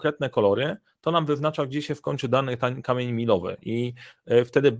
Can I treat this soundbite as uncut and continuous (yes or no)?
yes